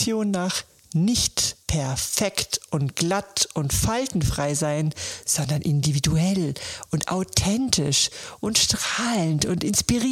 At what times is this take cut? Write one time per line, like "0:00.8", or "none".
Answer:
0:01.6

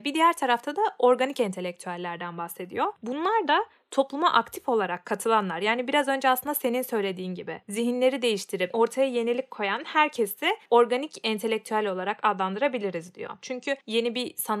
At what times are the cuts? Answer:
0:13.4

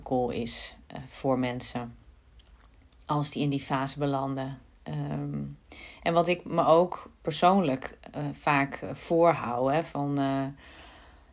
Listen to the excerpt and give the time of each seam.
none

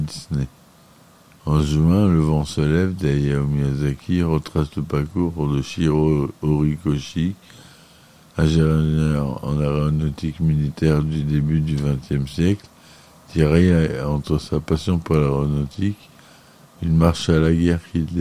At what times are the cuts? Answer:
0:01.4

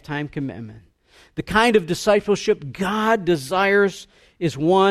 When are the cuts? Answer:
none

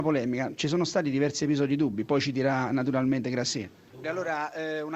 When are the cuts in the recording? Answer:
0:03.9

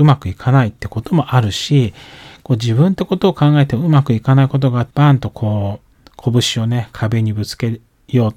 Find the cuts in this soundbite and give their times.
0:04.9

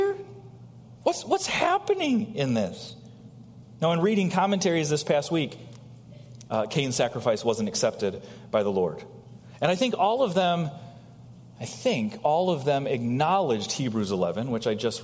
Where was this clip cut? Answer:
0:06.5

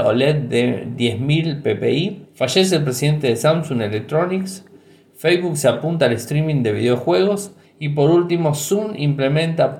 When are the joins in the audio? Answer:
0:02.3
0:07.6

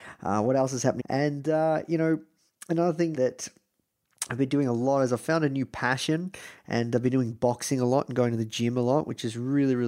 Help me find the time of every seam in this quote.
0:01.0
0:03.1
0:06.6

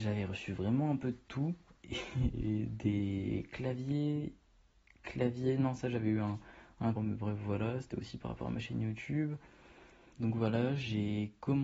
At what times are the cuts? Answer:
0:06.9
0:10.1

